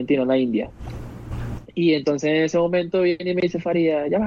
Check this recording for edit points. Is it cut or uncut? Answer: uncut